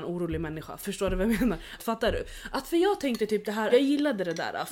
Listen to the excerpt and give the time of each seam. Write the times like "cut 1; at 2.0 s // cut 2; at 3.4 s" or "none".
cut 1; at 1.8 s // cut 2; at 3.7 s